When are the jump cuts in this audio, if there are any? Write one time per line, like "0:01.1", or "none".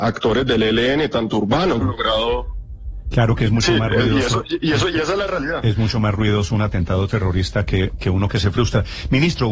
0:01.8